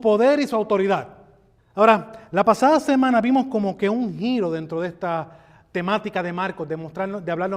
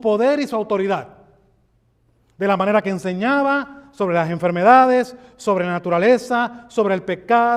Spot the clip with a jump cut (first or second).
first